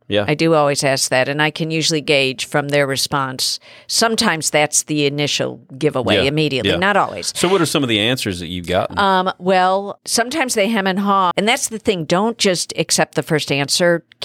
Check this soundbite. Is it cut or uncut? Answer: cut